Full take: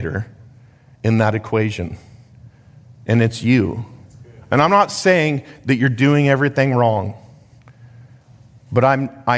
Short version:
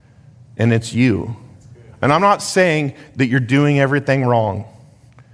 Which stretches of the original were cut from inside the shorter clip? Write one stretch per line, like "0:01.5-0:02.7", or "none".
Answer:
none